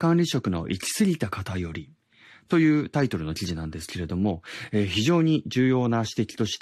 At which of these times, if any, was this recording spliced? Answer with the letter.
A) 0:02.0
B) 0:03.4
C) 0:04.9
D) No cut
D